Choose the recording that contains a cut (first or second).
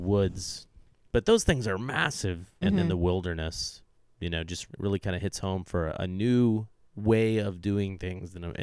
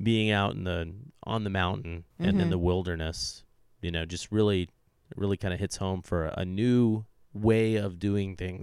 first